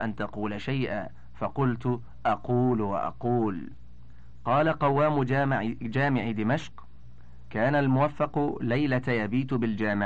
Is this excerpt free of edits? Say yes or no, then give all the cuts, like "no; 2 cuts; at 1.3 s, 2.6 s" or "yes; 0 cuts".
yes; 0 cuts